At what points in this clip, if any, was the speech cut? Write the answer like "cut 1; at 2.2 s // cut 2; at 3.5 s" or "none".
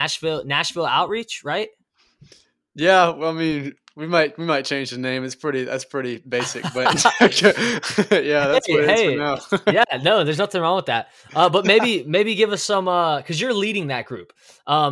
none